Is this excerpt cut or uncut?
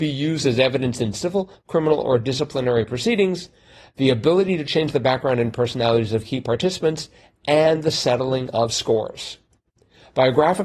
uncut